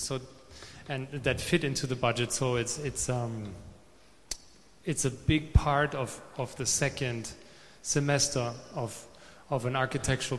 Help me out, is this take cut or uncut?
uncut